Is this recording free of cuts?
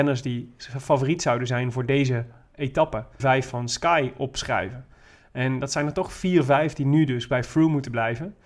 no; 1 cut; at 3.2 s

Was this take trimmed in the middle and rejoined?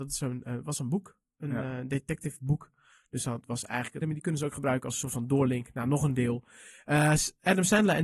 yes; 1 cut; at 4.0 s

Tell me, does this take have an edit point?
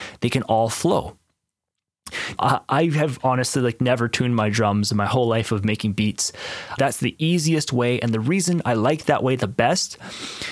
yes; 2 cuts; at 2.4 s, 6.8 s

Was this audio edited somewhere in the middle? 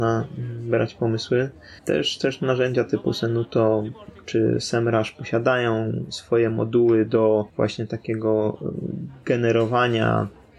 yes; 2 cuts; at 1.8 s, 7.5 s

